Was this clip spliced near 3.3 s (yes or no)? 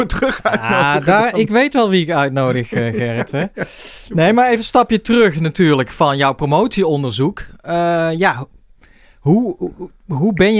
no